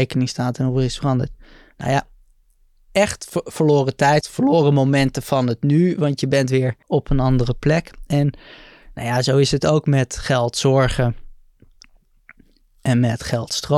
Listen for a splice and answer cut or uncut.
cut